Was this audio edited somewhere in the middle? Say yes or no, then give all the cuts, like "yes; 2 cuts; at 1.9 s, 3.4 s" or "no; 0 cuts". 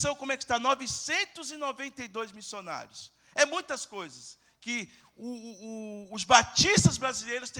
no; 0 cuts